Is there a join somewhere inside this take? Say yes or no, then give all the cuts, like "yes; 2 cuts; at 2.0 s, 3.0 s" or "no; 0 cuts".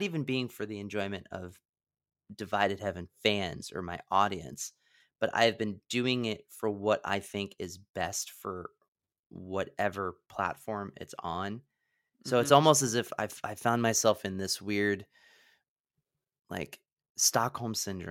no; 0 cuts